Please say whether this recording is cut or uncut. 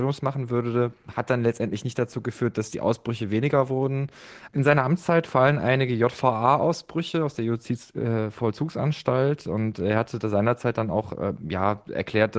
cut